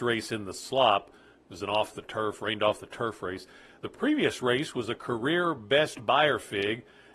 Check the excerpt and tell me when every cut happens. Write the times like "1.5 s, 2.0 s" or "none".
none